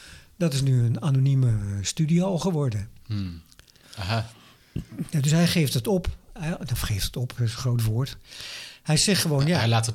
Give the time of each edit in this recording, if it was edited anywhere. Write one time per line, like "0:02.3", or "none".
0:03.8